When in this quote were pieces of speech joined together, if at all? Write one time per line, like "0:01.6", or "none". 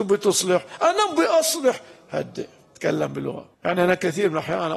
0:03.5

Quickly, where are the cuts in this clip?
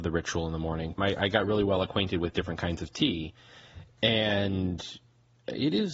0:01.0

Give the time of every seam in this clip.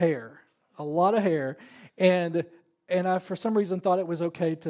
none

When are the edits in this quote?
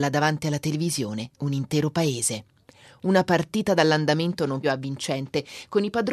0:04.6

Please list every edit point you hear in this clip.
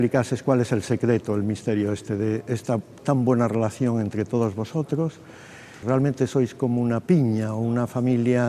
0:05.8

